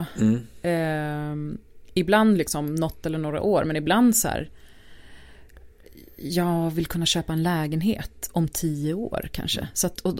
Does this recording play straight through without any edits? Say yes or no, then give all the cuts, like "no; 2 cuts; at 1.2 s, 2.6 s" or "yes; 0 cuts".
yes; 0 cuts